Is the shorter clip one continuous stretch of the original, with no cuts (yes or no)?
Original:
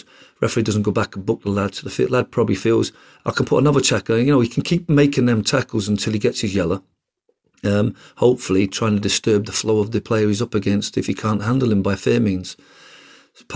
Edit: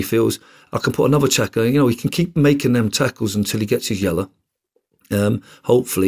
yes